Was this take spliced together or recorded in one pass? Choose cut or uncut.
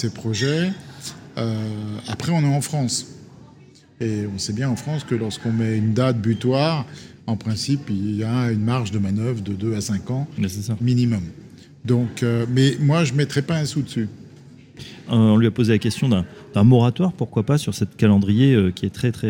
cut